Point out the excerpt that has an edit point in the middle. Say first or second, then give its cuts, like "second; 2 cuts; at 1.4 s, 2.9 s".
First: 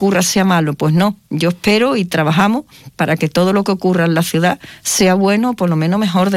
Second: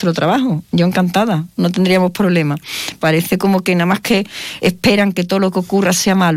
second; 2 cuts; at 3.0 s, 4.6 s